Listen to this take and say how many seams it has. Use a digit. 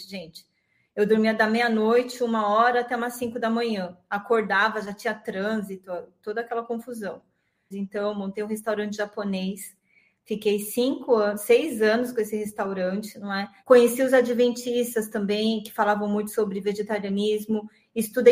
2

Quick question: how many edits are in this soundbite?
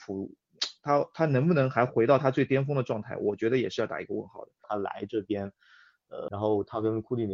2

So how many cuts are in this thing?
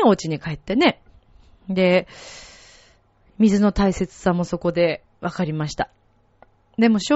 0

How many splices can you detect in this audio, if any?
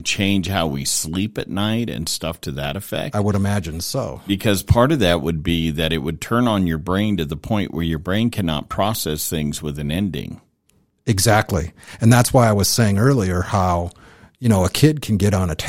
0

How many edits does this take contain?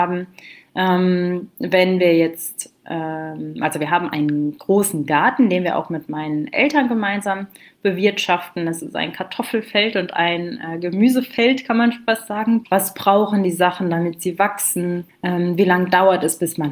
2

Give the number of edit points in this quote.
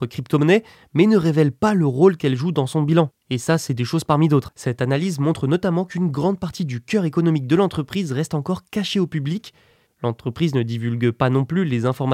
2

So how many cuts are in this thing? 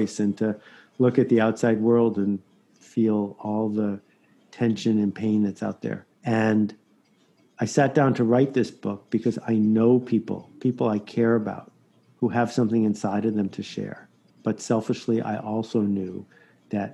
2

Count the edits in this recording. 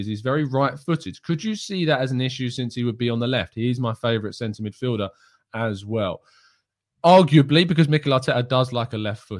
0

